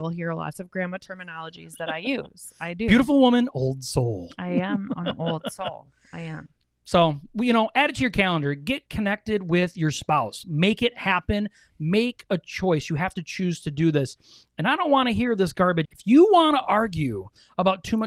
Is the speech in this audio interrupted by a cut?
yes; 1 cut; at 15.8 s

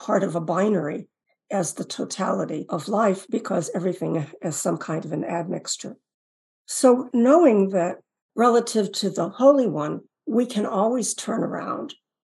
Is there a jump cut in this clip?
no; 0 cuts

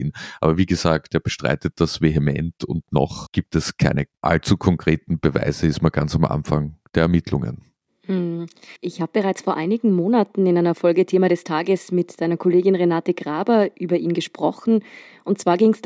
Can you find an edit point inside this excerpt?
yes; 1 cut; at 8.8 s

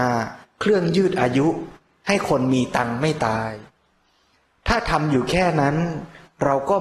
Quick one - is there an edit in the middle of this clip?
no; 0 cuts

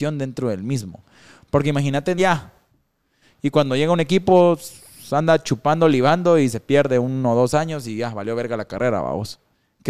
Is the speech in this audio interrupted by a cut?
yes; 1 cut; at 2.2 s

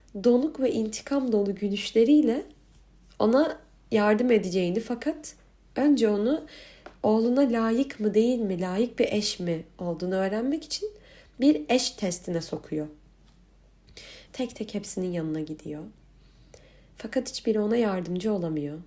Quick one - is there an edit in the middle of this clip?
yes; 1 cut; at 14.3 s

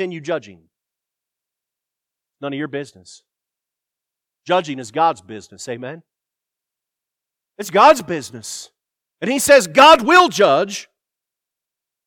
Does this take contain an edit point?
no; 0 cuts

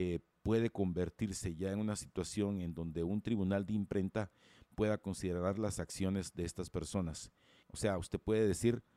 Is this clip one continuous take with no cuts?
no; 1 cut; at 7.6 s

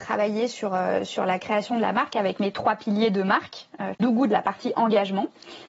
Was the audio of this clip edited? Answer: yes; 1 cut; at 3.9 s

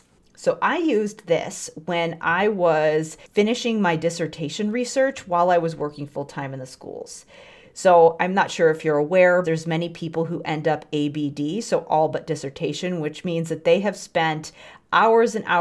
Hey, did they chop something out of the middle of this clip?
yes; 1 cut; at 9.4 s

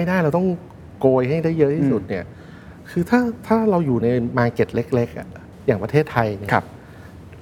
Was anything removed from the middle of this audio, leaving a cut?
no; 0 cuts

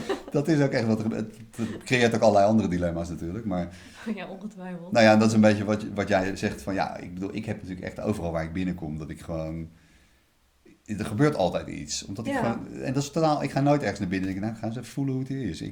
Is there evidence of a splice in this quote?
no; 0 cuts

